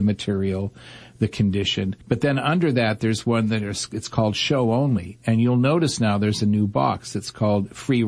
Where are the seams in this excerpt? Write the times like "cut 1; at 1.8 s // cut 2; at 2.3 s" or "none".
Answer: cut 1; at 2.0 s